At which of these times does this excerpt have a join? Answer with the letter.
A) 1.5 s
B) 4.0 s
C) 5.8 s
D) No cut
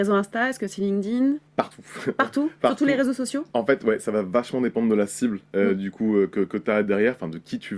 A